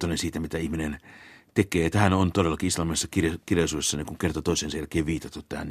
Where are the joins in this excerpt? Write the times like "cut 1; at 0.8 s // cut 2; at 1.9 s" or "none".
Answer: none